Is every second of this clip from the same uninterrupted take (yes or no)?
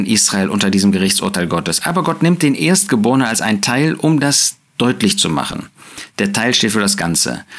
yes